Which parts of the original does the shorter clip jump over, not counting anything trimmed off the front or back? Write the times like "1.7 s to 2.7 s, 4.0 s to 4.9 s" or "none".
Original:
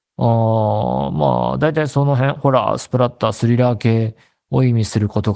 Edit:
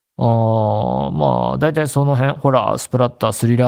none